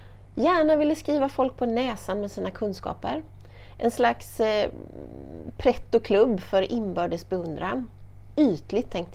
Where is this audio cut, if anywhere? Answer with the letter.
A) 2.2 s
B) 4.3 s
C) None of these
C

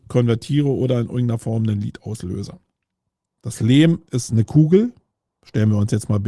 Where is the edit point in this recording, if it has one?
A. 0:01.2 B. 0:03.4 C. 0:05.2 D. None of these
B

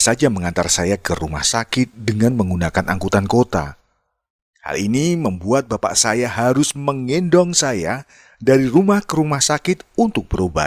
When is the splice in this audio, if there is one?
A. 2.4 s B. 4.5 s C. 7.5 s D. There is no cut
B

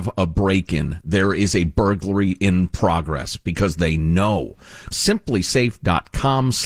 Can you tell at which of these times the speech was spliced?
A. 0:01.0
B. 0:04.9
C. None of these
B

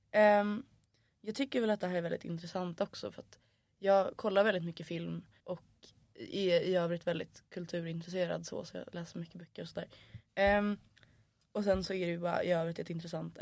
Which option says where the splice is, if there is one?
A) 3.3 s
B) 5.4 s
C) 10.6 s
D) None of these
B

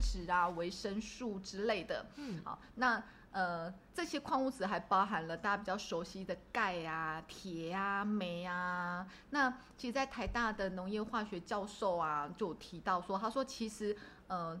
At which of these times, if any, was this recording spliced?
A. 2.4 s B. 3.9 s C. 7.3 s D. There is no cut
B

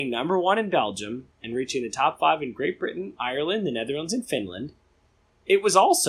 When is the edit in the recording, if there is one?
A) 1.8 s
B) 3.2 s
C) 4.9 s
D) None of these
D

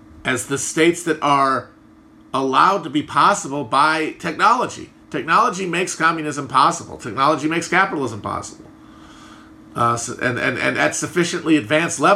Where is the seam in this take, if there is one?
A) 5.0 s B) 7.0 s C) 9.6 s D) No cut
D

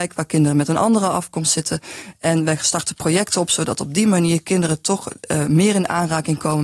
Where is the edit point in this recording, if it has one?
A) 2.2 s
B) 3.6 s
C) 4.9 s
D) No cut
D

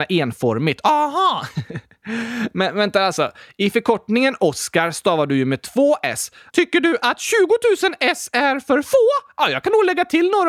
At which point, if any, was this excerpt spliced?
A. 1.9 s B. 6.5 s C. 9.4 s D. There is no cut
B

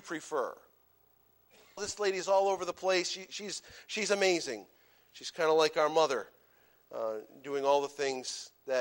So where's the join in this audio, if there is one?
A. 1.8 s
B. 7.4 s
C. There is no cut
A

